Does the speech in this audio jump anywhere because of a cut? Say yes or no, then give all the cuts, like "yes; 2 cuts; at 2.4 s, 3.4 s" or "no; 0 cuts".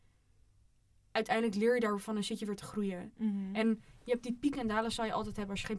no; 0 cuts